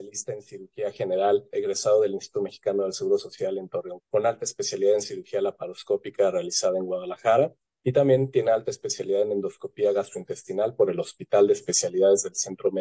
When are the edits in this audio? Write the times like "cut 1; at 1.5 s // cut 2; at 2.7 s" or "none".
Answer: cut 1; at 1.5 s // cut 2; at 4.0 s